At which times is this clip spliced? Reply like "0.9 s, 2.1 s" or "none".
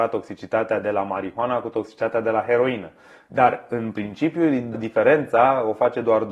4.7 s